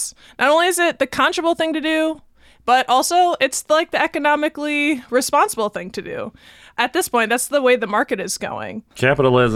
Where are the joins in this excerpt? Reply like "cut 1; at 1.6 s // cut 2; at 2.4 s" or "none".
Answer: none